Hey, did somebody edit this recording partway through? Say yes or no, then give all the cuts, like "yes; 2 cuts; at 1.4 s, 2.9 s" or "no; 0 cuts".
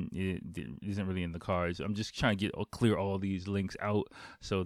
no; 0 cuts